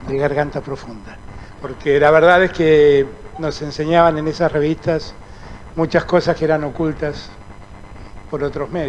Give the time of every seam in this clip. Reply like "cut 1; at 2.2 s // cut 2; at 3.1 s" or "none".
cut 1; at 1.5 s